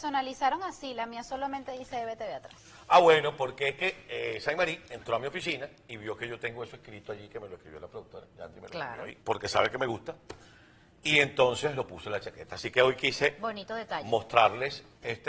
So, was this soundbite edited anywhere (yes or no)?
yes